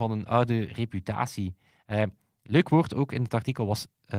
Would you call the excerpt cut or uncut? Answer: uncut